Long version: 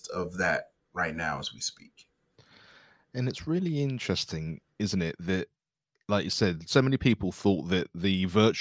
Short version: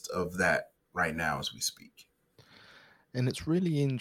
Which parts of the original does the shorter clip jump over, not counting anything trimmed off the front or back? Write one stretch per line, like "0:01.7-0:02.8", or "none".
none